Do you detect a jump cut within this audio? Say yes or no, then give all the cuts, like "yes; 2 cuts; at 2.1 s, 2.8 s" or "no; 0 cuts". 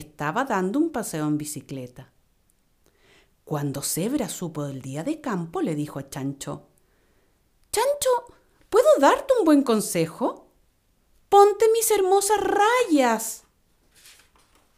no; 0 cuts